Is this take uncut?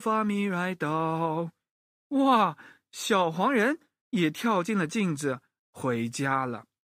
yes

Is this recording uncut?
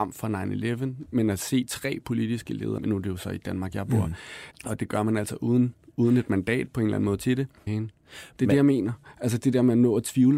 no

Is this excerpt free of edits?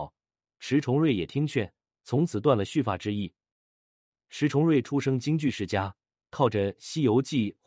yes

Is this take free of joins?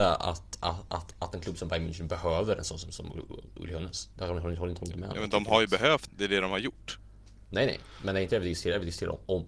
no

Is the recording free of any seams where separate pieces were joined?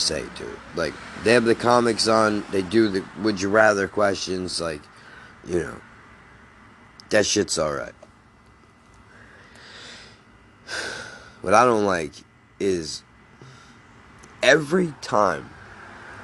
yes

